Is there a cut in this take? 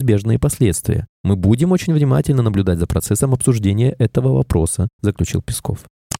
no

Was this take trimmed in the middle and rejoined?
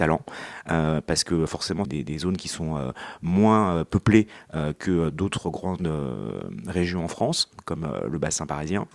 yes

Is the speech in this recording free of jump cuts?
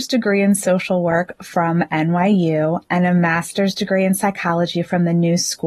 yes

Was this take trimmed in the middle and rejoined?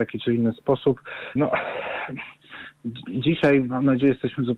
yes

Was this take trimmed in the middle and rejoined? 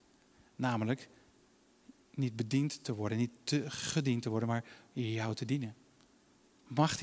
no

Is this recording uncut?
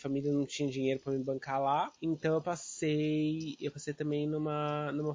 no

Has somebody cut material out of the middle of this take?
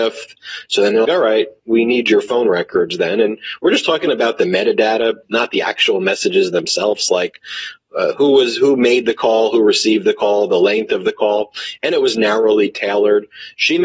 yes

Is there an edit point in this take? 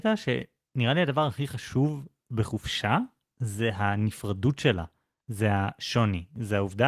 no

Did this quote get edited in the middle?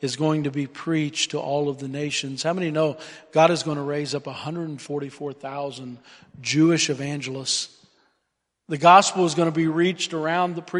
no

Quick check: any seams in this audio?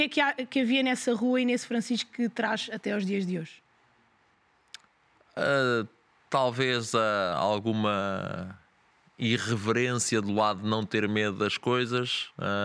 no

